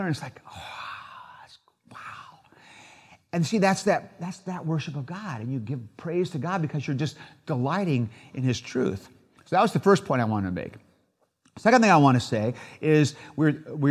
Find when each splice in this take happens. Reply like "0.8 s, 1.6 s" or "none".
9.4 s